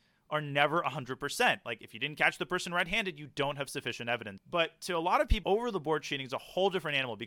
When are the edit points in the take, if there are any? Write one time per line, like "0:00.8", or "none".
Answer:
0:04.4
0:05.4